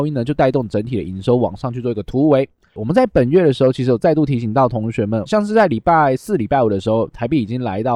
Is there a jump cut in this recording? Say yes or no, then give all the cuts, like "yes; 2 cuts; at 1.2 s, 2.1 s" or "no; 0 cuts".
yes; 2 cuts; at 2.8 s, 5.3 s